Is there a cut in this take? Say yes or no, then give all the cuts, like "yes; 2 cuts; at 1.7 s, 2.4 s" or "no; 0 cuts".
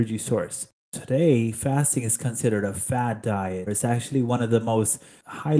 yes; 1 cut; at 3.7 s